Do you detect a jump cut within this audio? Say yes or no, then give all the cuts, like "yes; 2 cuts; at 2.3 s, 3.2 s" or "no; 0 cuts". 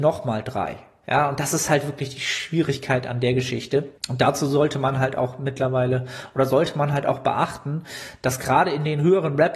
yes; 2 cuts; at 1.0 s, 4.0 s